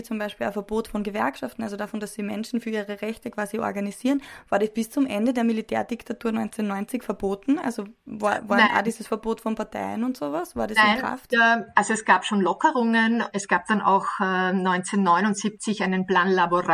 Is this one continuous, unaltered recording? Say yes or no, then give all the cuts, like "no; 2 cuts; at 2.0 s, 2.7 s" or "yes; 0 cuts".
no; 2 cuts; at 11.3 s, 13.3 s